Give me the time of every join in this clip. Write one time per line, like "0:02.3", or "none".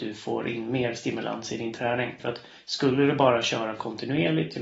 0:02.2